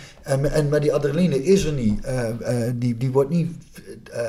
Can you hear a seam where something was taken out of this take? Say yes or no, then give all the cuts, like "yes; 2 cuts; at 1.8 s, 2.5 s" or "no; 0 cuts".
no; 0 cuts